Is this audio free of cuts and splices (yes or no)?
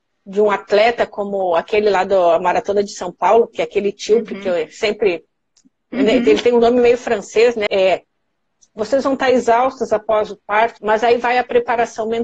no